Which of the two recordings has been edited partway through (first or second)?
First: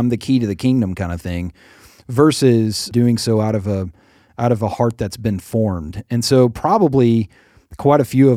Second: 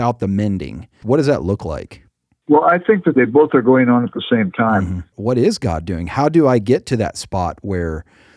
second